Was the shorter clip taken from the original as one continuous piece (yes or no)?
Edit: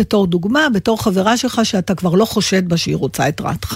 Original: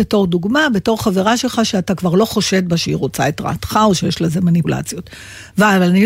yes